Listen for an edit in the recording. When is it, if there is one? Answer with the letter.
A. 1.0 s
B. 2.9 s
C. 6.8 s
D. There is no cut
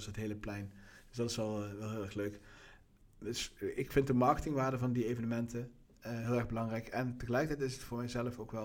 D